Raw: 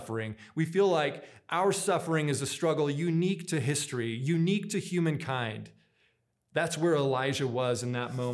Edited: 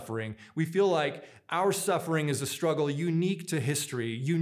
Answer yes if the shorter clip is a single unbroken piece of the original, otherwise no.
yes